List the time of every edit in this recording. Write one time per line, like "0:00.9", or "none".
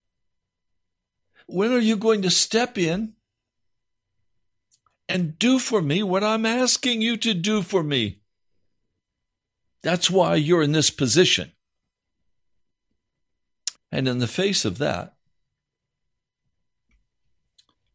0:09.6
0:13.7